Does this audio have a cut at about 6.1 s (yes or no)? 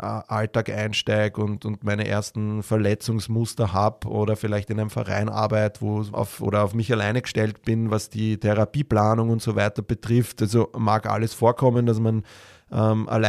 yes